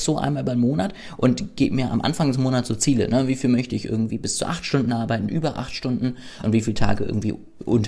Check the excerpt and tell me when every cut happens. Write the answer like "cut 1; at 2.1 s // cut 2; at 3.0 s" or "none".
cut 1; at 5.3 s // cut 2; at 6.4 s